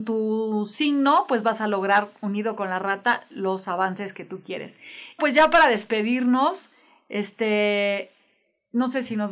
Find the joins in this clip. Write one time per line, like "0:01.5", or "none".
0:05.2